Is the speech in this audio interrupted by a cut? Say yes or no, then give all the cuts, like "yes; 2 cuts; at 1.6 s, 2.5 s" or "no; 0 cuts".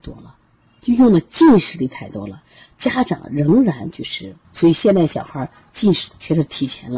yes; 1 cut; at 4.4 s